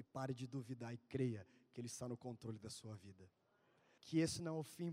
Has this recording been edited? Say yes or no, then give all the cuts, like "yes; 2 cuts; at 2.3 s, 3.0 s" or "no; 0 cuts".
yes; 1 cut; at 4.0 s